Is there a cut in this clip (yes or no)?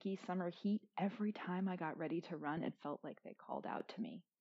no